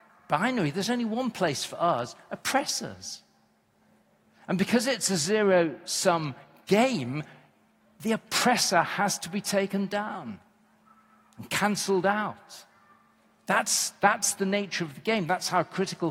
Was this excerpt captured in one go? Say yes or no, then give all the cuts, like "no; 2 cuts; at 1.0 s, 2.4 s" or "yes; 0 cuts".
yes; 0 cuts